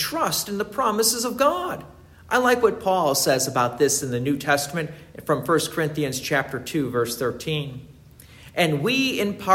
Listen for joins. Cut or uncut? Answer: uncut